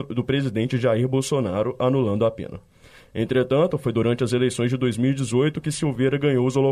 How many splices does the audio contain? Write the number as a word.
zero